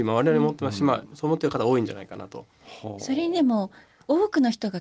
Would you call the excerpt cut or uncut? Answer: uncut